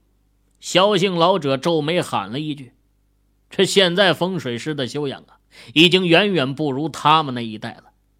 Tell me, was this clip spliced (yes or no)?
no